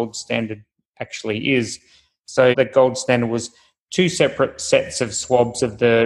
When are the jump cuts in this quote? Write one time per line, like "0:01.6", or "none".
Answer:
0:02.5